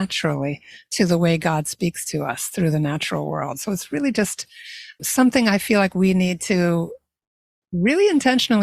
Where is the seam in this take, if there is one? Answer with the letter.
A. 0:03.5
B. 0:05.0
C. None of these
B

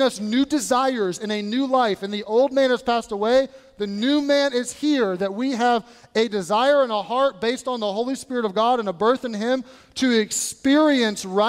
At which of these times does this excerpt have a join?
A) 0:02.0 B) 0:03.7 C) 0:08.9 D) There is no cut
D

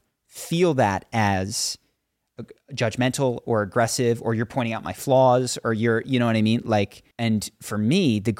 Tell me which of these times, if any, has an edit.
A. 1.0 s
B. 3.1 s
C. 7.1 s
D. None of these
C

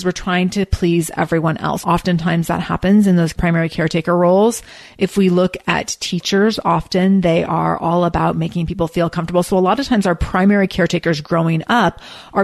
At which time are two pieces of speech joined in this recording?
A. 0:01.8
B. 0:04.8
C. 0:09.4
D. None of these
A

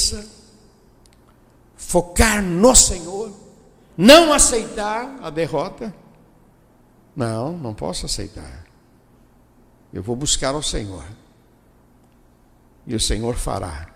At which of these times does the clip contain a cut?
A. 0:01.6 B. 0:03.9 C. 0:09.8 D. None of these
B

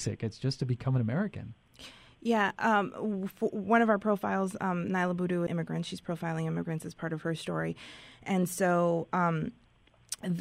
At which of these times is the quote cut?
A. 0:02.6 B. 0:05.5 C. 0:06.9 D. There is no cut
B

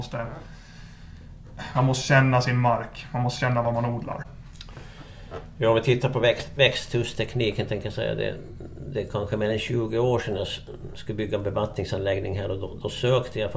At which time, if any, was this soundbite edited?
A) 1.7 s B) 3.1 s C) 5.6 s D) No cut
D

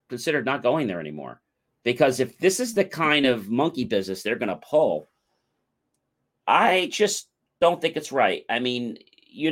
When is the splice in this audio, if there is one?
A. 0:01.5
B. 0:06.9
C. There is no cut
C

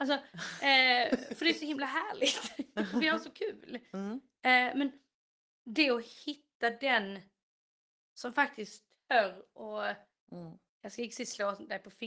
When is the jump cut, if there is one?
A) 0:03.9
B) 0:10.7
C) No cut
B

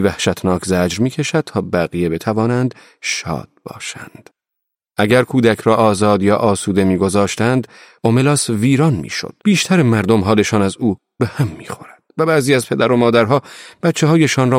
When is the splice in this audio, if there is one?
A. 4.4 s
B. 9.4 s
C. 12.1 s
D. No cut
B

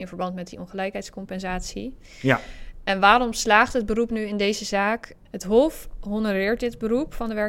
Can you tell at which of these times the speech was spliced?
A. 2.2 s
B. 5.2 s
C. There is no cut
B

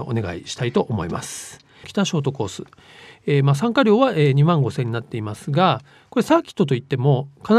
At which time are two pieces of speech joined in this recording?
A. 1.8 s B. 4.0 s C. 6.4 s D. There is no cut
A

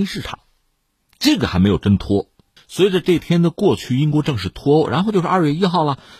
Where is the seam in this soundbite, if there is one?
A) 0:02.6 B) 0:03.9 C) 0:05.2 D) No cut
A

